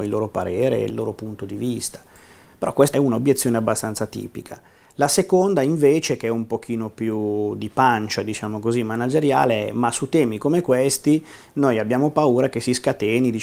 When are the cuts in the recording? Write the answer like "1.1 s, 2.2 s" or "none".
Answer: none